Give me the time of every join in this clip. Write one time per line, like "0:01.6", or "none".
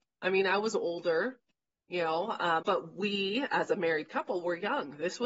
0:02.6

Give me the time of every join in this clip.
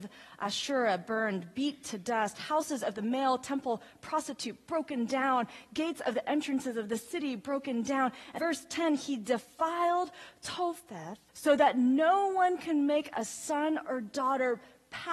0:08.4
0:11.3

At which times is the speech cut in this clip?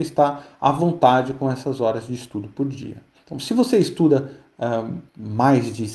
none

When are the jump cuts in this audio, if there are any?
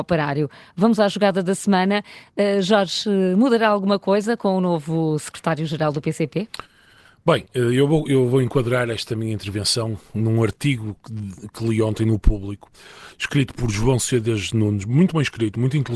none

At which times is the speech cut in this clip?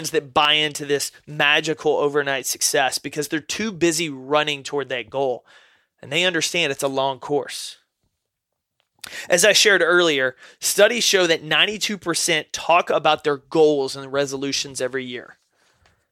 none

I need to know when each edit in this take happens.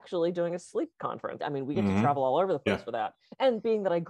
0:01.4

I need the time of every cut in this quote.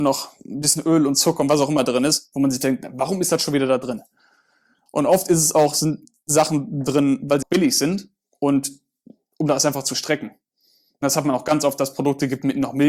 0:07.4

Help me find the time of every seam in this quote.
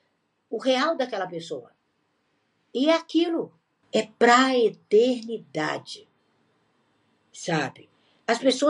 0:03.8

